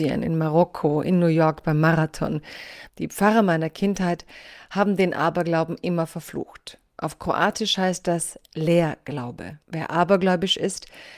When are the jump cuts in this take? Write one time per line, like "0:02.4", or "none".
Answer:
0:02.9
0:09.6